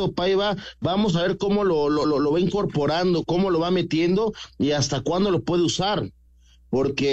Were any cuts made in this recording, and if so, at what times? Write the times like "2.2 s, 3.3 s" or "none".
2.0 s